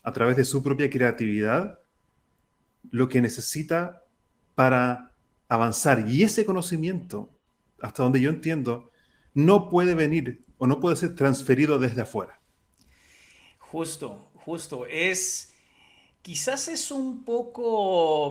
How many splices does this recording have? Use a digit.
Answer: 0